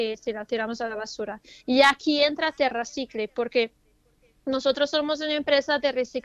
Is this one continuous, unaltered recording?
yes; 0 cuts

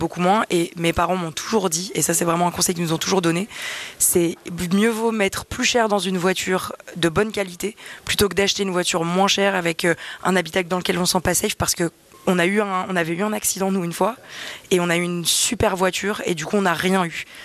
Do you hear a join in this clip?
no; 0 cuts

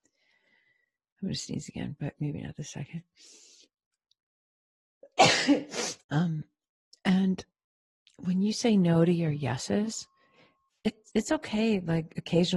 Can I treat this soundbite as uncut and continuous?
no; 1 cut; at 6.0 s

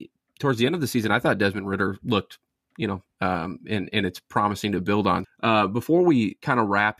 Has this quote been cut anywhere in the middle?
yes; 2 cuts; at 3.1 s, 5.2 s

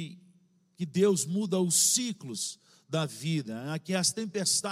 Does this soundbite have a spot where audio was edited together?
no; 0 cuts

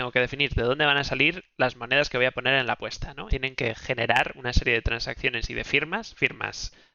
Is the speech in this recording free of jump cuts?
no; 1 cut; at 3.3 s

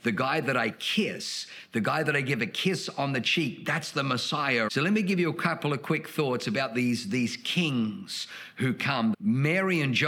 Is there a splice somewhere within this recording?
yes; 2 cuts; at 4.7 s, 9.1 s

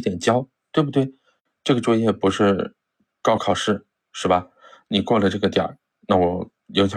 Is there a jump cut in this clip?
yes; 1 cut; at 3.4 s

